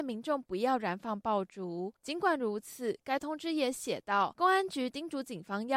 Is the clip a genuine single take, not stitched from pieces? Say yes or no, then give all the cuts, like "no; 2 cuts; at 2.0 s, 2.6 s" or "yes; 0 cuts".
yes; 0 cuts